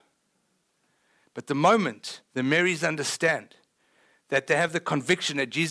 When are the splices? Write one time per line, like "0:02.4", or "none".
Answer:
none